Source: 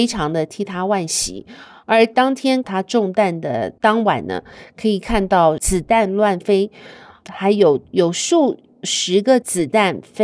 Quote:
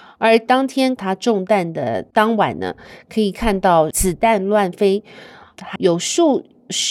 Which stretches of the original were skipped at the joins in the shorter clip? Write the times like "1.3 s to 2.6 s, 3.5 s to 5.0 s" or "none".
7.4 s to 7.9 s